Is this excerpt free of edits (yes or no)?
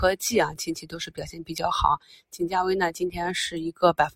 yes